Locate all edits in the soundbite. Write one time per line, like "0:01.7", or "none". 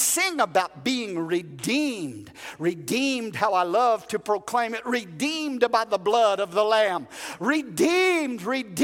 none